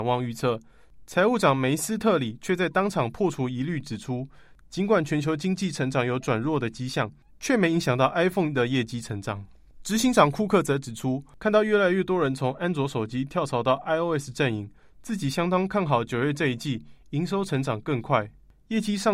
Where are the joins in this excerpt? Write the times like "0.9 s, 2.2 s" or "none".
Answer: none